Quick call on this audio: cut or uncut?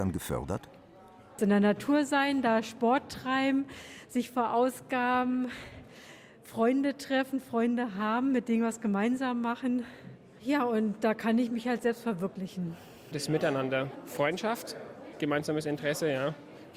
cut